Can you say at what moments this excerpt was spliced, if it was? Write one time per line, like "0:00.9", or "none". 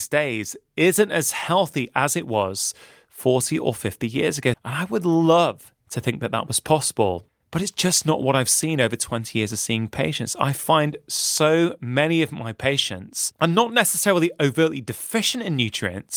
0:04.5